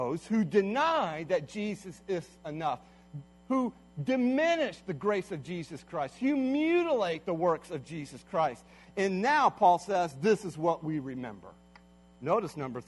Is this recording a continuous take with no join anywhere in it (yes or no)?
yes